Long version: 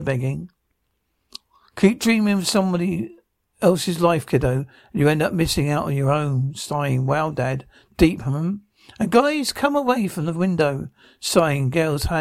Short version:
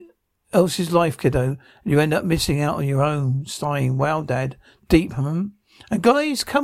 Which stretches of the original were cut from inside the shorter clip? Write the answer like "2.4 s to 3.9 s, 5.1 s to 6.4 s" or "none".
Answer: none

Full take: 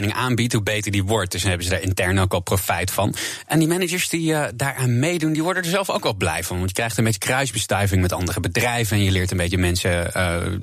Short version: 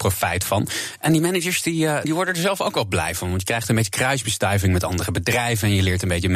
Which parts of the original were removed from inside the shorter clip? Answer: 4.5 s to 5.3 s

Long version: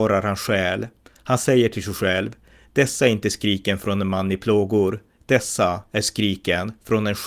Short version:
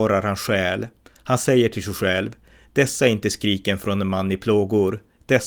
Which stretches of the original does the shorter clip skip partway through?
none

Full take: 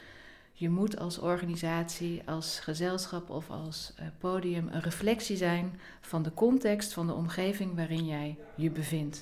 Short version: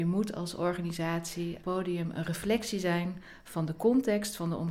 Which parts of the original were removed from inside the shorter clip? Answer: 2.2 s to 4.2 s

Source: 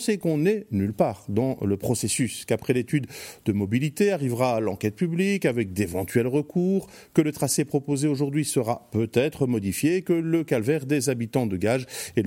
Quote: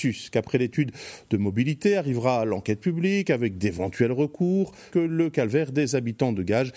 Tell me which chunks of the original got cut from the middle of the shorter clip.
7.1 s to 10.0 s

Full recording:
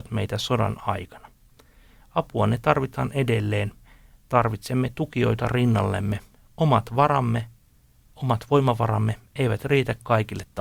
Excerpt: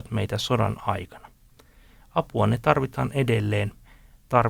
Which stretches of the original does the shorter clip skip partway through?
none

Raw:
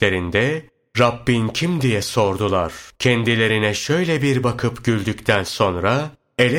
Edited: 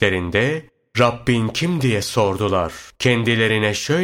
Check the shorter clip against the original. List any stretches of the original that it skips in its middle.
none

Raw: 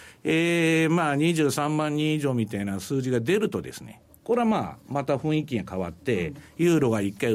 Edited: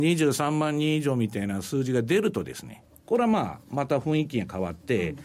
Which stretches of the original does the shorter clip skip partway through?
none

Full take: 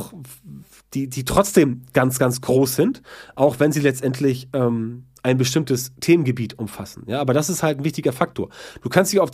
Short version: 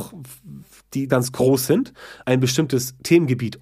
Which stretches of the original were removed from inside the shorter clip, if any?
1.1 s to 2.2 s, 3.3 s to 5.2 s

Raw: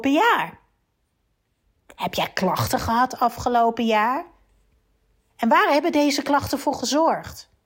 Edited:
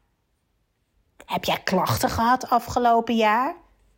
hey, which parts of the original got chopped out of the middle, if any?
none

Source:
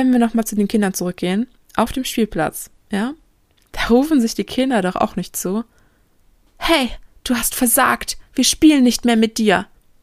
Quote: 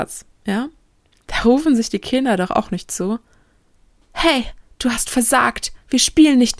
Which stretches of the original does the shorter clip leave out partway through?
none

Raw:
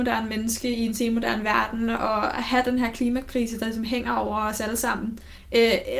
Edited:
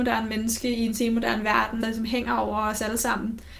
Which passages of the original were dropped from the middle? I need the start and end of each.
1.8 s to 3.6 s

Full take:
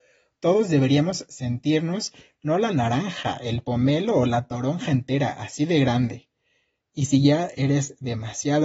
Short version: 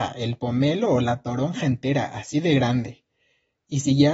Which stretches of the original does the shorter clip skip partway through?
none

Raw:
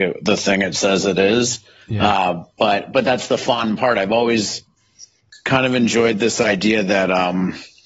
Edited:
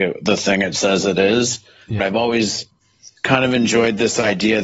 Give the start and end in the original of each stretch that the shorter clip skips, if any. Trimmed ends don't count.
2.0 s to 3.9 s, 5.1 s to 5.4 s

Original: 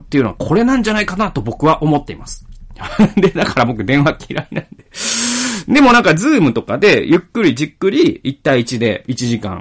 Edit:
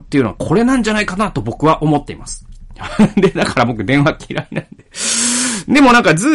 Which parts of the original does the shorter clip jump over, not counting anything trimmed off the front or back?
none

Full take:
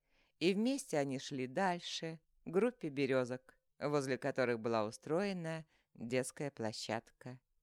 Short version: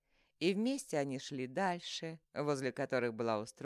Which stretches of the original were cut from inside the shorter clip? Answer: 2.3 s to 3.7 s

